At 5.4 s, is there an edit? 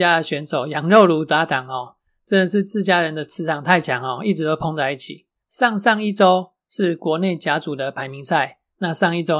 yes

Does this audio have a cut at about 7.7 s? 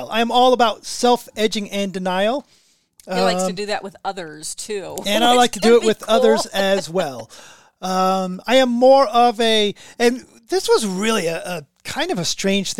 no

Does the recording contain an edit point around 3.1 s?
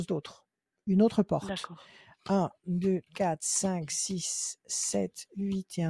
yes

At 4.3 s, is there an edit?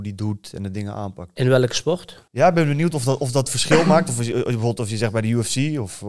no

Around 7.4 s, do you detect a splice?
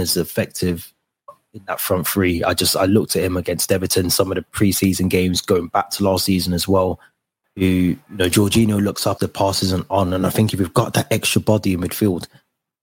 yes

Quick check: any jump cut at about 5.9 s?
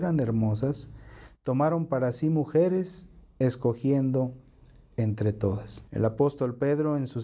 yes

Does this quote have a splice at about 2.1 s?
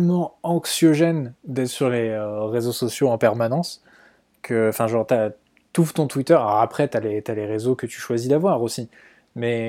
no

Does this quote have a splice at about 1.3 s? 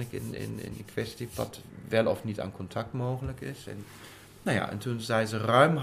yes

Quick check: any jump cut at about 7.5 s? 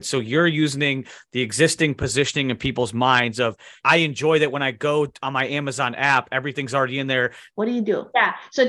yes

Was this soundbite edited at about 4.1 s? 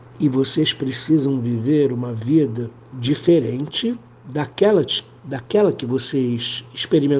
no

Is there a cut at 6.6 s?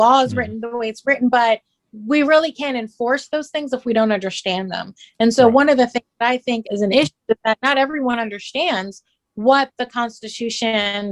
yes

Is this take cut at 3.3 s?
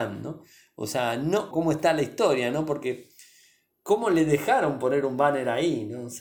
no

